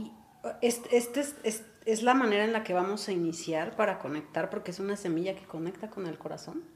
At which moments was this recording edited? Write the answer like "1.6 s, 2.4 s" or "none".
none